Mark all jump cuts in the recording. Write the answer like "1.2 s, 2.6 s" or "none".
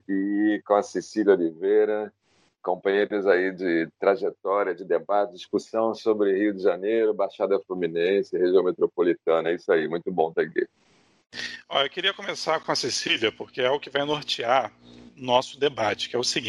none